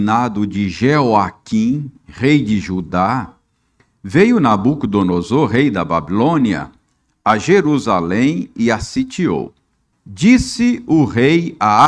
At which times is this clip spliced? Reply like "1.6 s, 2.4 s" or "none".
9.9 s